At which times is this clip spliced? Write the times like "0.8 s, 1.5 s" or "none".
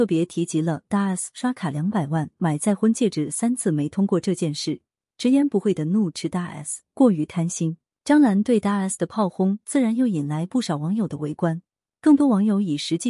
5.1 s